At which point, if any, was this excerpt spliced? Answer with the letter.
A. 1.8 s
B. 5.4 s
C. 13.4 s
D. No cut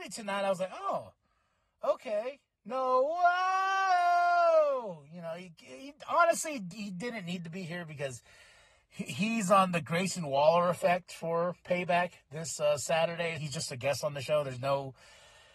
C